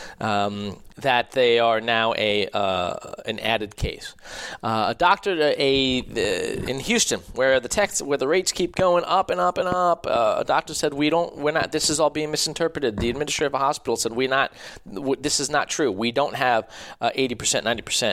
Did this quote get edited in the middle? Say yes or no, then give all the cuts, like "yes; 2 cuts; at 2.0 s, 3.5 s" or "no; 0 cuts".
no; 0 cuts